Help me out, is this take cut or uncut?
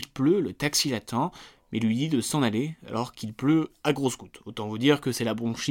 uncut